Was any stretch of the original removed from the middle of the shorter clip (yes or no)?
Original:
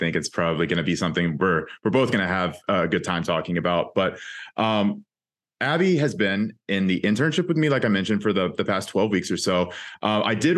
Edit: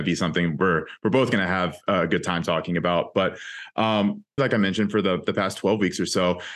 yes